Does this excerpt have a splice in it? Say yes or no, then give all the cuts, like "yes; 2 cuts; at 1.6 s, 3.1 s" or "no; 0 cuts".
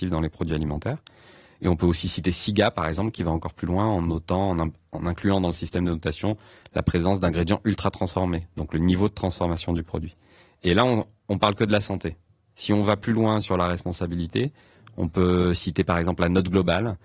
no; 0 cuts